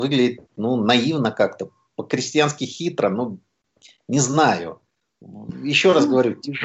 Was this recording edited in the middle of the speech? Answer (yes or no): no